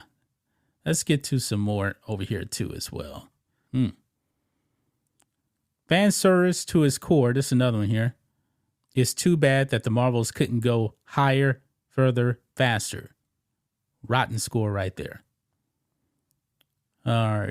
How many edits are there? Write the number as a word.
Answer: two